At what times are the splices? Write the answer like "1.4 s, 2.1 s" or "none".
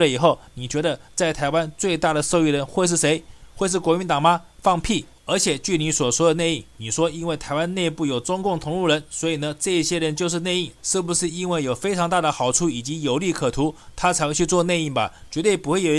5.2 s, 10.8 s